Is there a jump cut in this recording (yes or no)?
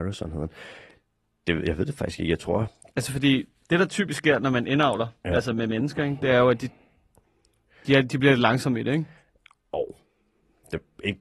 no